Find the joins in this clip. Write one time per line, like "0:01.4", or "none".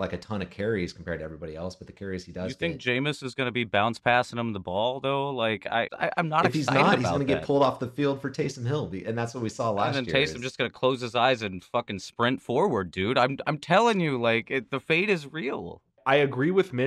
0:05.9